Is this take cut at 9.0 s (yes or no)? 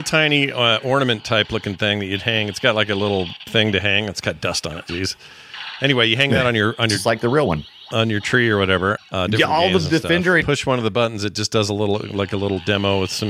yes